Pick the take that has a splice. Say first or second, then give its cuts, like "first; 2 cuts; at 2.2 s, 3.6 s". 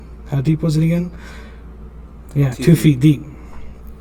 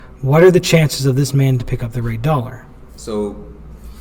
second; 1 cut; at 2.9 s